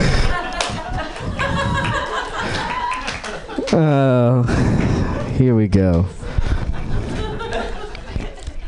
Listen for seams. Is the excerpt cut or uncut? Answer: uncut